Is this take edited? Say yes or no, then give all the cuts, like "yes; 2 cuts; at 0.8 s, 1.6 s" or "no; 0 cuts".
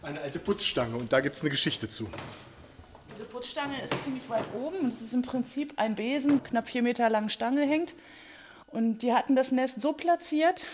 yes; 2 cuts; at 6.4 s, 8.6 s